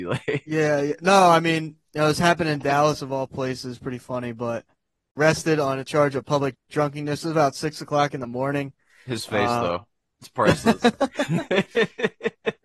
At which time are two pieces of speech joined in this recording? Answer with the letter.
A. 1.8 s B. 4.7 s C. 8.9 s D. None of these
A